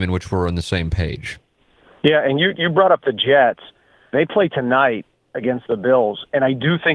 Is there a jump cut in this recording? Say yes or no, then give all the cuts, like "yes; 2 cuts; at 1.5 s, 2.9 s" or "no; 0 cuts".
no; 0 cuts